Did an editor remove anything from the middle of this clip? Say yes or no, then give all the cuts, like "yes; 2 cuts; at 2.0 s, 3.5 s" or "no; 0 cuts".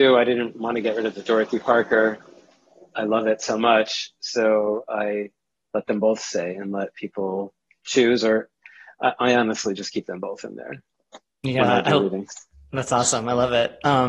no; 0 cuts